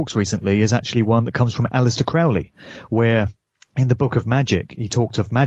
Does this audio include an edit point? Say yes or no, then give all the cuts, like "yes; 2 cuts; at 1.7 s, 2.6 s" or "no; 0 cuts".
no; 0 cuts